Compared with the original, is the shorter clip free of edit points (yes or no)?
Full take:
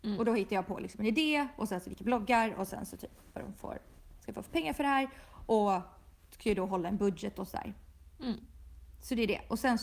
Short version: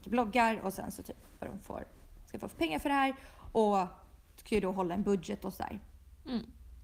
yes